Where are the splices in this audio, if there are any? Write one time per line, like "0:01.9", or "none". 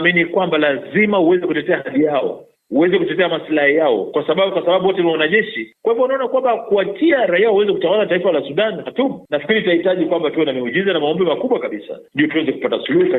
0:05.8